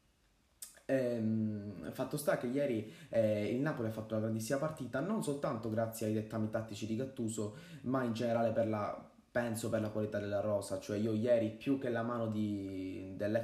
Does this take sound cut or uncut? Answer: uncut